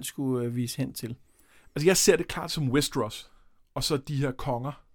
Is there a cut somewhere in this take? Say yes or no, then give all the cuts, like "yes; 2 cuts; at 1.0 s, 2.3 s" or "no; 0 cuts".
no; 0 cuts